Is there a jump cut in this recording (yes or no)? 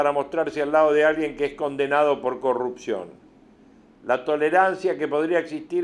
no